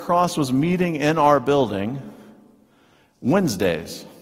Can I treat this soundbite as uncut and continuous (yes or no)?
yes